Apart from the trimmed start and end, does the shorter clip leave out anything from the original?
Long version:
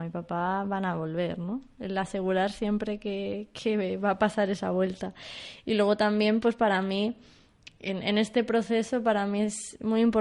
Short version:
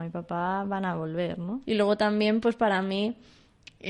yes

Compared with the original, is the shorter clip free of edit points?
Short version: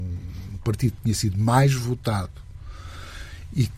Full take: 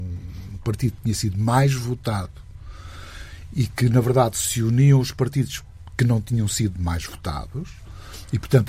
yes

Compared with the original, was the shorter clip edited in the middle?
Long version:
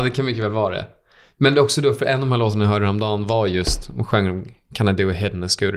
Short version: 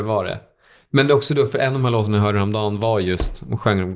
no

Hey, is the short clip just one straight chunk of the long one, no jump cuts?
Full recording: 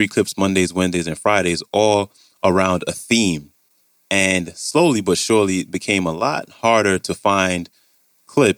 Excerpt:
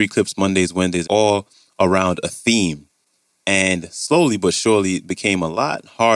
no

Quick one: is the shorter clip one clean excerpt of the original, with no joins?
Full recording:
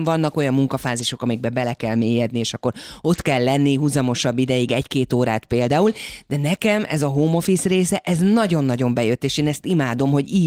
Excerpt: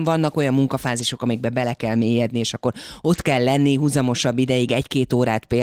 yes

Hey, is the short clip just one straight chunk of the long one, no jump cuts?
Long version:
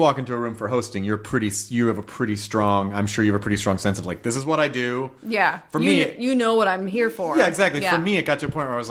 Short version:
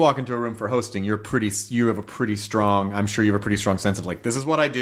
yes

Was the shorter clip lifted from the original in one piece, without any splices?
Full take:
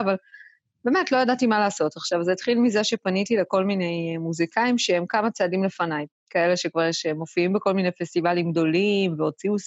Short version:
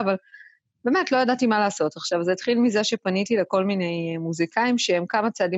yes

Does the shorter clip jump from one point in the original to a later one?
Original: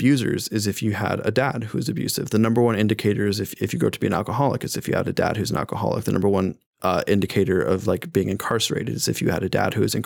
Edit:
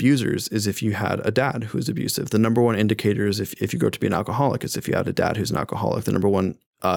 no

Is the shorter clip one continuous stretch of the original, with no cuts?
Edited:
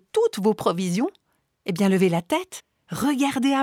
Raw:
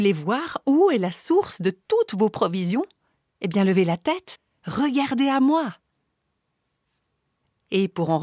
yes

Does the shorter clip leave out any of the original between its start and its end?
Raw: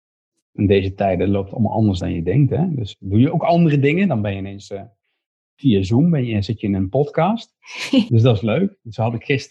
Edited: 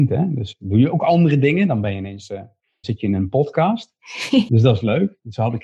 yes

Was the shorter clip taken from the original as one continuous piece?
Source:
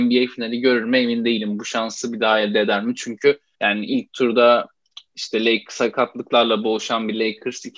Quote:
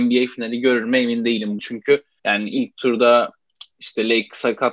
no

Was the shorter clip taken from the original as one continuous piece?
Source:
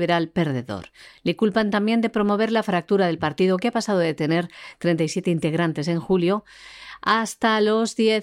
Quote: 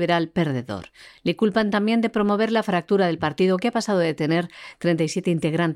yes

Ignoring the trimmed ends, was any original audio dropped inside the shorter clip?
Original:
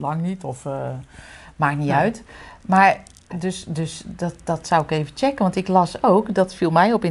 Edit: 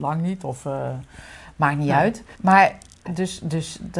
yes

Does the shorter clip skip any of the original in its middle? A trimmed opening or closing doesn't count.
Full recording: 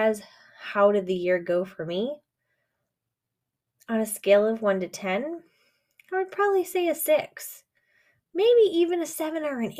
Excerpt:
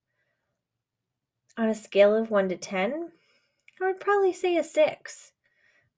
no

